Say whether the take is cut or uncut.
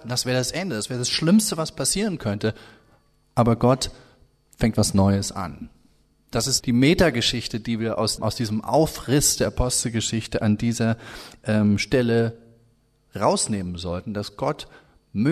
cut